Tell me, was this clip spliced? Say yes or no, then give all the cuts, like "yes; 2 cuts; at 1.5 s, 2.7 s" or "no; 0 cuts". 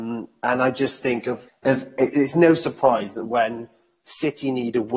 yes; 1 cut; at 1.5 s